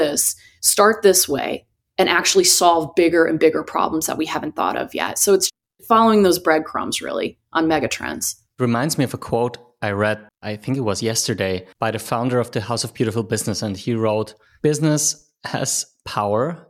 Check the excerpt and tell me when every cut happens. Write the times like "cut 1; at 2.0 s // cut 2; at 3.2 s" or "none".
cut 1; at 11.7 s